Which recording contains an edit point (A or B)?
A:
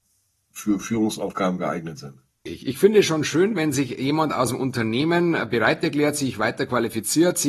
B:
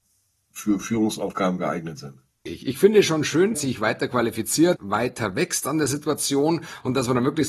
B